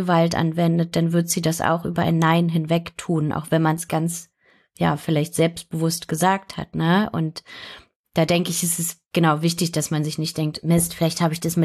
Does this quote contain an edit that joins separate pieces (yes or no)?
no